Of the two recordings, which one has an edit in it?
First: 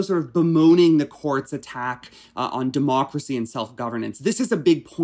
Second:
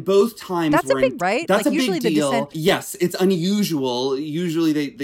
second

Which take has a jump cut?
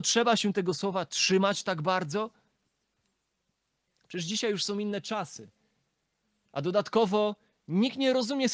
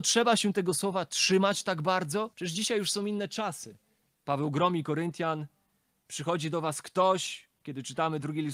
second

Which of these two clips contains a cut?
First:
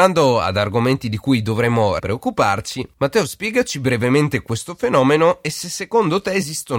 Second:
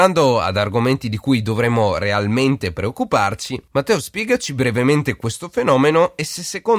first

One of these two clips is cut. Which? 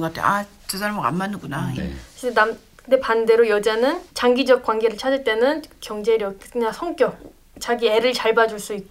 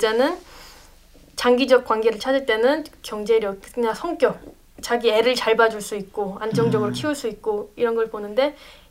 first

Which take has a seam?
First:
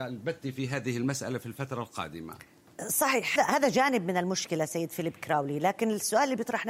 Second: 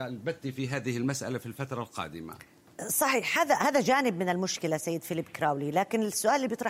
first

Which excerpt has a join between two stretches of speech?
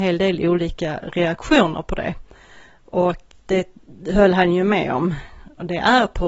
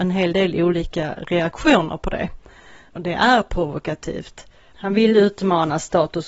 second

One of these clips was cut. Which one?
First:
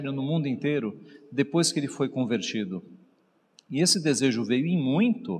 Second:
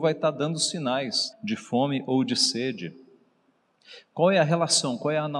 second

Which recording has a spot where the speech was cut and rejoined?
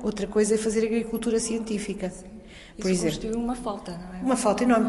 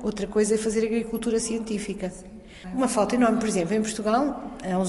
second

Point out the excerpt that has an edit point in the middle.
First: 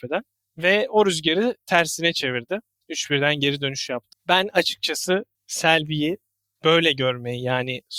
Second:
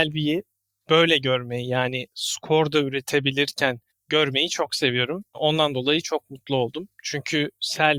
first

